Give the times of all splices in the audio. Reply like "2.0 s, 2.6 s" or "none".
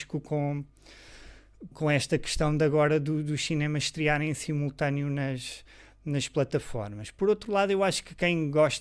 1.7 s